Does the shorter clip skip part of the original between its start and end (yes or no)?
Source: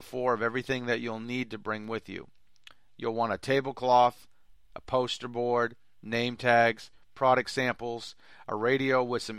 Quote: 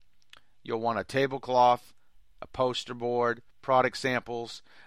yes